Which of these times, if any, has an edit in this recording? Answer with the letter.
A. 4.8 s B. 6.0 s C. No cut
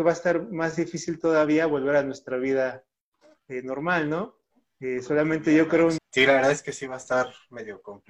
B